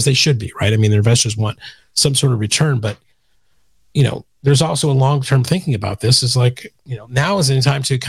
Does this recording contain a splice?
no; 0 cuts

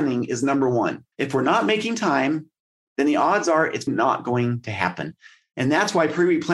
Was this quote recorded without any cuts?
no; 2 cuts; at 1.1 s, 3.9 s

